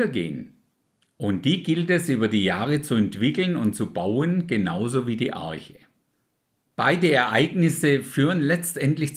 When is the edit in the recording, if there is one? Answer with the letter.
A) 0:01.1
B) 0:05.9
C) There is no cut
A